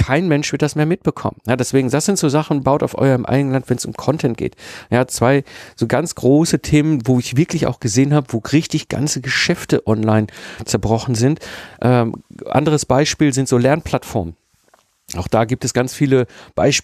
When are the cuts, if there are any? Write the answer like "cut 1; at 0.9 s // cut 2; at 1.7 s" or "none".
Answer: none